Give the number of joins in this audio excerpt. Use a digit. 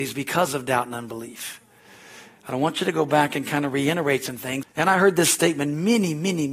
1